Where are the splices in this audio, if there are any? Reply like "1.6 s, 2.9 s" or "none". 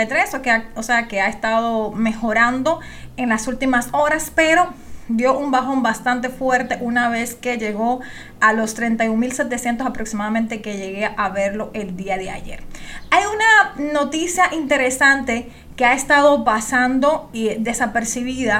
none